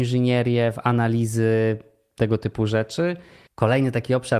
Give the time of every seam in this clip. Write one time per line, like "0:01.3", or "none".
0:03.5